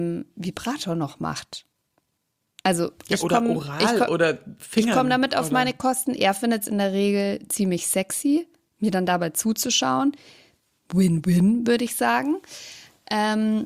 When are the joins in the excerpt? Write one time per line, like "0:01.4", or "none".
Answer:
none